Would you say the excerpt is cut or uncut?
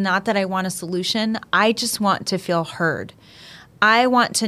uncut